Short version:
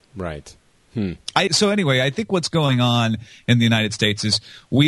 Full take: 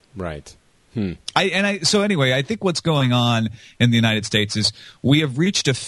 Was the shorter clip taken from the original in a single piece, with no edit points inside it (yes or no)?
no